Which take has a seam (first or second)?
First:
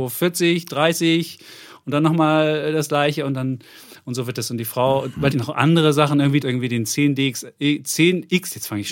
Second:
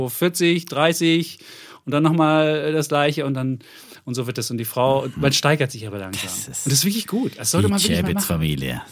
first